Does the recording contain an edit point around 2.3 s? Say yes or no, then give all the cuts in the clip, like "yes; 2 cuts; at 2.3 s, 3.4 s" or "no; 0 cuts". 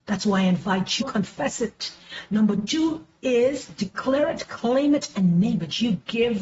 no; 1 cut; at 1.0 s